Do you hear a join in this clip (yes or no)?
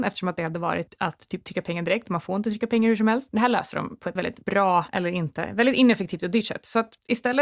yes